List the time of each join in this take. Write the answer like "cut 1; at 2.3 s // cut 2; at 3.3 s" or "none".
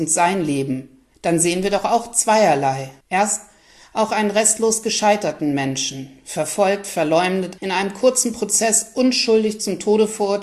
cut 1; at 3.0 s // cut 2; at 7.6 s